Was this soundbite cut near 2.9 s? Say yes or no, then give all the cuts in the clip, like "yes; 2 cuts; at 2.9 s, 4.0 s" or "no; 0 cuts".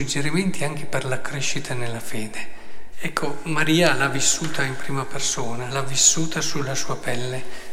yes; 2 cuts; at 2.9 s, 5.7 s